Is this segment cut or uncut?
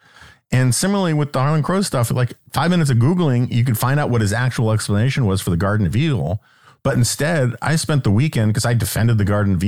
uncut